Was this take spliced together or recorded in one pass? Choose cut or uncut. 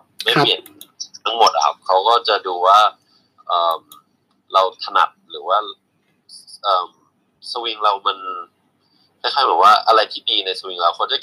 uncut